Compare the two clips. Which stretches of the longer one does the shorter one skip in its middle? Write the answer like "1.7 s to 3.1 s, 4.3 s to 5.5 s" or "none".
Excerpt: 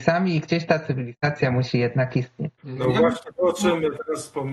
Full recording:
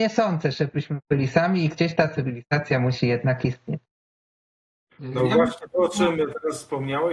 3.9 s to 4.9 s

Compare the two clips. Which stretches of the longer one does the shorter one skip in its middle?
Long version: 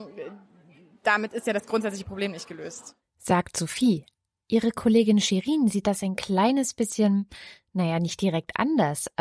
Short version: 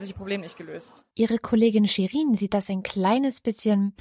3.0 s to 4.4 s

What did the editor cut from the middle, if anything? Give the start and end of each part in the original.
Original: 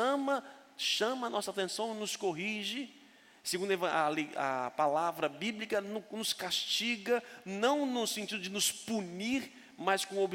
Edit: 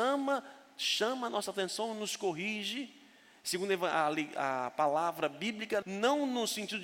5.8 s to 7.4 s

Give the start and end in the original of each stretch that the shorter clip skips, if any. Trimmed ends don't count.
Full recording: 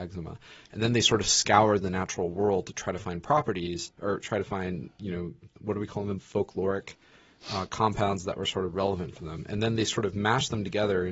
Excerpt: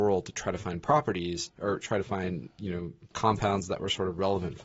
5.5 s to 7.7 s

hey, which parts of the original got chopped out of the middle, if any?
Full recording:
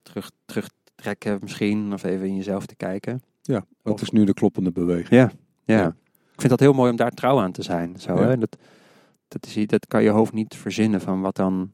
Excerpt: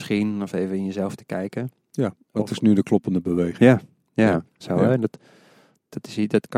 6.1 s to 8.0 s

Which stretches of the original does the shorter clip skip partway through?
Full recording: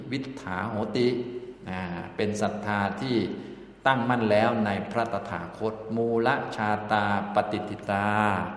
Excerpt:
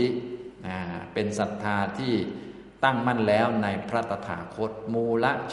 none

